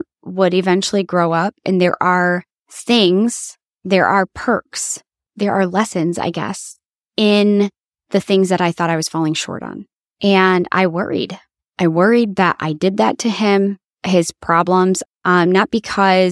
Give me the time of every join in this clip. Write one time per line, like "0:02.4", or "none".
0:10.1
0:13.9
0:15.1